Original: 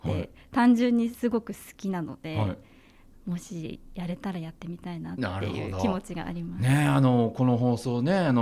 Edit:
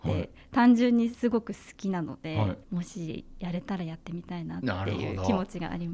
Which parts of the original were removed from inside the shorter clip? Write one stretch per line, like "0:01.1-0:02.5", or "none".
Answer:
0:02.6-0:03.2